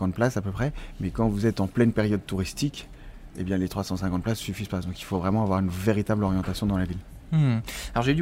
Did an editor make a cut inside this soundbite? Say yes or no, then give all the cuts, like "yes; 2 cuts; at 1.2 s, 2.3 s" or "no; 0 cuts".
no; 0 cuts